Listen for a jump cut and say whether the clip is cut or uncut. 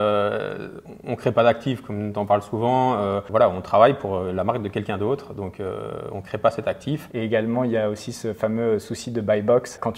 cut